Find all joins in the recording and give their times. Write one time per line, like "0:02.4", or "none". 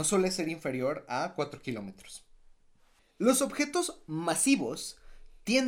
0:03.0